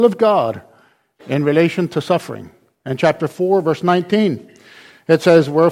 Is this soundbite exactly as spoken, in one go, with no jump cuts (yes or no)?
yes